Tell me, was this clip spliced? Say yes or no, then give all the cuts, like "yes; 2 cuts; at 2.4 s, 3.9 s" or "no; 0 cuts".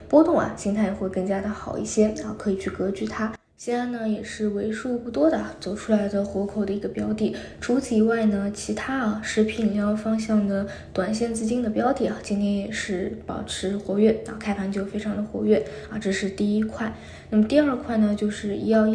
no; 0 cuts